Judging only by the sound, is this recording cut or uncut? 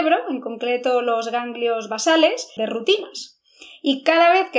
cut